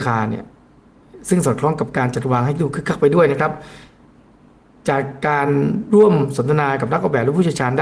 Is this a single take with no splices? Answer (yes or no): yes